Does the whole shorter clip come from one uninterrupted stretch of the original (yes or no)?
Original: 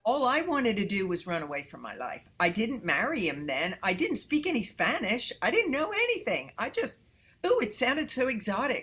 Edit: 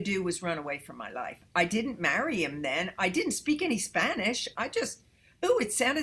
no